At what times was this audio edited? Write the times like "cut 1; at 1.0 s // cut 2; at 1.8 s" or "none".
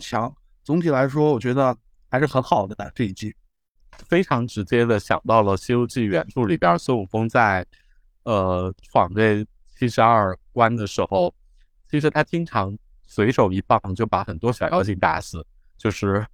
none